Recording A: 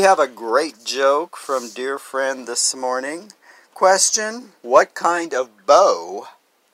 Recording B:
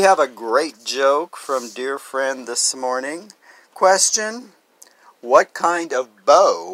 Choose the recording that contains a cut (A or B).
A